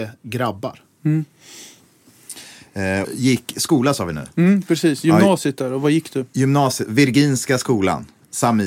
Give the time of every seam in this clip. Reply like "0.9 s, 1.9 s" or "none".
3.0 s